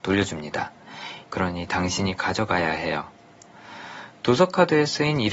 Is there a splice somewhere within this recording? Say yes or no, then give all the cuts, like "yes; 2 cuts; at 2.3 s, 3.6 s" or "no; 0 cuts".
yes; 1 cut; at 1.2 s